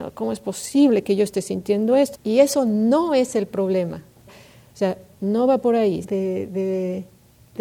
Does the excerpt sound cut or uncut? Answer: cut